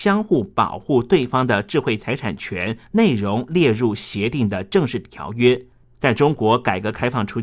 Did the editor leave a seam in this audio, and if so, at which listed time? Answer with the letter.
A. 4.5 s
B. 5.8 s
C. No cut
B